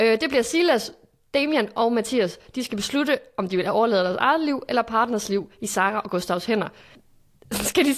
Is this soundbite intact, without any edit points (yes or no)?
yes